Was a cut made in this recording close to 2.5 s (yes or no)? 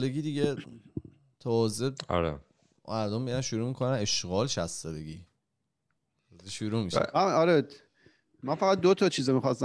no